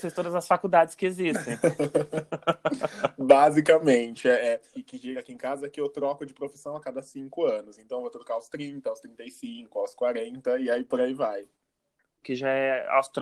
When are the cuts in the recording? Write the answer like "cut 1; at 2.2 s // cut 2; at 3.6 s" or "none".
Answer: cut 1; at 4.7 s // cut 2; at 12.2 s